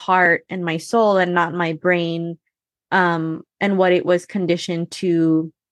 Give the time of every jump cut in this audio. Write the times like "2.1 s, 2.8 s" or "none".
none